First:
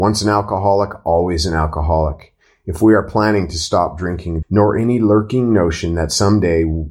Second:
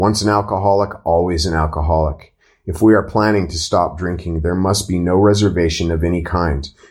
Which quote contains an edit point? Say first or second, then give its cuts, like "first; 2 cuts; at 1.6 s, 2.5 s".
first; 1 cut; at 4.4 s